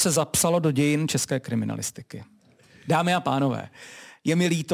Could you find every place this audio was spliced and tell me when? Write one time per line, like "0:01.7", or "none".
none